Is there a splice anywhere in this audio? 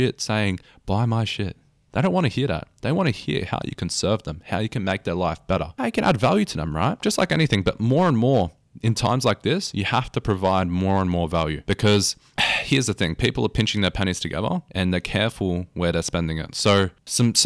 no; 0 cuts

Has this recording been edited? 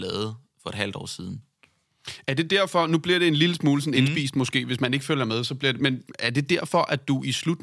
yes; 1 cut; at 5.8 s

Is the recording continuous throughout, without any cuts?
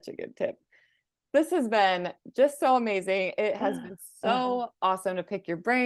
yes; 0 cuts

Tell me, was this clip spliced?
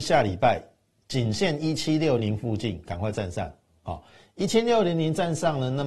yes; 1 cut; at 2.2 s

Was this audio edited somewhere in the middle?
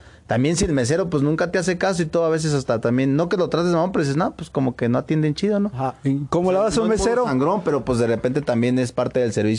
no; 0 cuts

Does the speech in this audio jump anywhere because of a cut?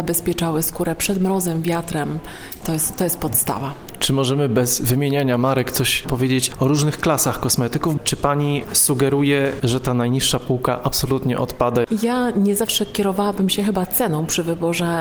no; 0 cuts

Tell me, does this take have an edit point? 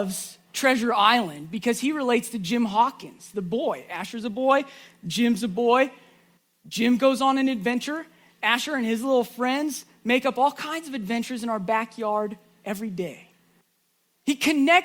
no; 0 cuts

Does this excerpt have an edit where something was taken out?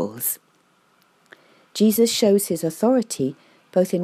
no; 0 cuts

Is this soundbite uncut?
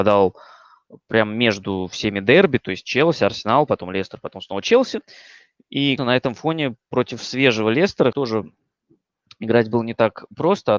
no; 2 cuts; at 6.0 s, 8.1 s

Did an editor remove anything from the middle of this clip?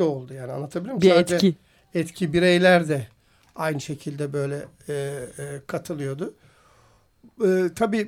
no; 0 cuts

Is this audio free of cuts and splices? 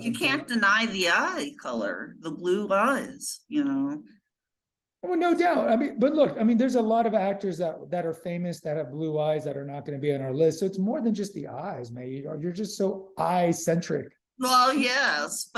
yes; 0 cuts

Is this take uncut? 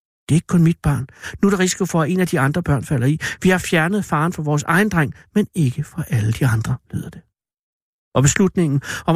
yes; 0 cuts

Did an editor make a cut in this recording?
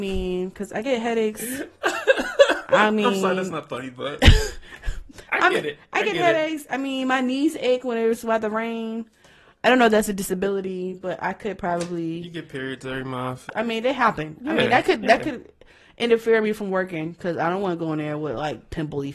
yes; 1 cut; at 13.5 s

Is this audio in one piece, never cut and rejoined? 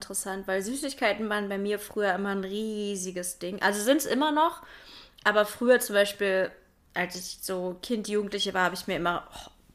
yes; 0 cuts

